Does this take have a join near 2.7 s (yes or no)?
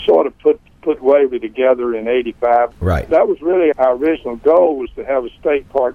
yes